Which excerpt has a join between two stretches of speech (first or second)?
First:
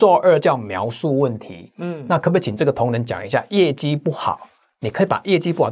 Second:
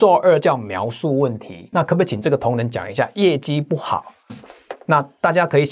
second